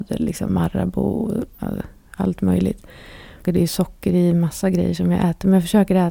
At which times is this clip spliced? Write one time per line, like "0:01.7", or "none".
0:03.4